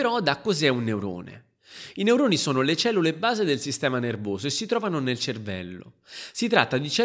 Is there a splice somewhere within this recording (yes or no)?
no